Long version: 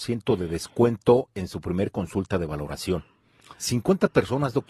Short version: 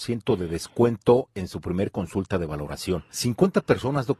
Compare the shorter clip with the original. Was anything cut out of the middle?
yes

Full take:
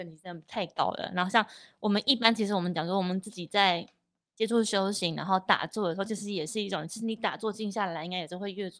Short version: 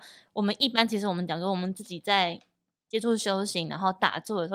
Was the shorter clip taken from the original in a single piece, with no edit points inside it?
yes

